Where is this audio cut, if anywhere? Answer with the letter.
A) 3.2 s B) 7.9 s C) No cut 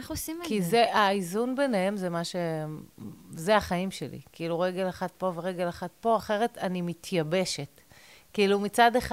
C